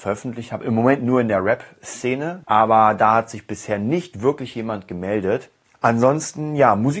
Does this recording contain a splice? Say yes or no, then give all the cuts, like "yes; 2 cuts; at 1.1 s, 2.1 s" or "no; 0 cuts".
yes; 2 cuts; at 2.4 s, 5.7 s